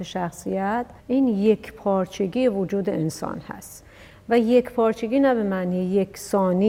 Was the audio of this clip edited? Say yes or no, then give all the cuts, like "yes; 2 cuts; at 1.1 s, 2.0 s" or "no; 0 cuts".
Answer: yes; 1 cut; at 1.0 s